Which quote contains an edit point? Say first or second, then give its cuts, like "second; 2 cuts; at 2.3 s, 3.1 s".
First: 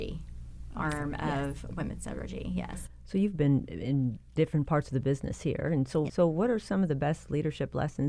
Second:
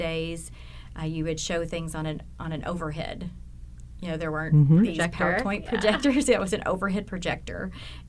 first; 1 cut; at 6.1 s